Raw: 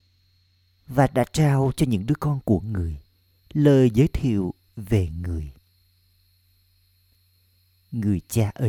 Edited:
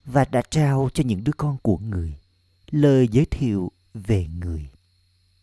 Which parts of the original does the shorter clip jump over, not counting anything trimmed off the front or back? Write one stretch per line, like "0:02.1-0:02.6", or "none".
none